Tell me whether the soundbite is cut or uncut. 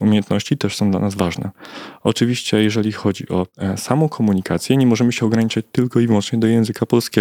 uncut